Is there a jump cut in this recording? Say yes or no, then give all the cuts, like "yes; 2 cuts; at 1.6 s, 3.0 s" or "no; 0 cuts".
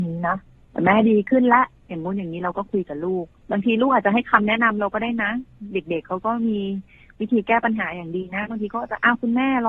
no; 0 cuts